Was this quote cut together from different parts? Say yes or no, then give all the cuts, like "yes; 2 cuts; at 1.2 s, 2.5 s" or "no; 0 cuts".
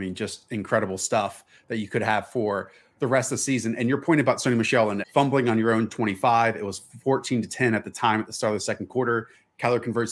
yes; 1 cut; at 5.0 s